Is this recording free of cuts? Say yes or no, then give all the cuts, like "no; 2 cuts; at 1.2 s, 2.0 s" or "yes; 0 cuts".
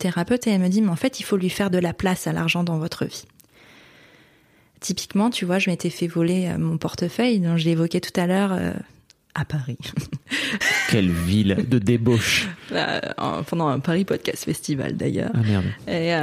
no; 1 cut; at 10.6 s